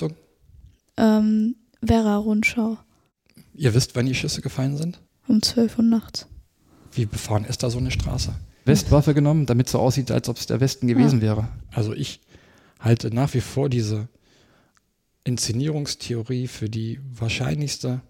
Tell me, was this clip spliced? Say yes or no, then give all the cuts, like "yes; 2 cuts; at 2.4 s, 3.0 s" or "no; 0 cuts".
yes; 2 cuts; at 5.1 s, 8.7 s